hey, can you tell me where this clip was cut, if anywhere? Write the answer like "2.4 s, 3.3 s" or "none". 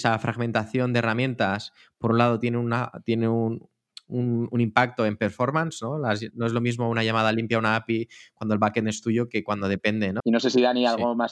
10.2 s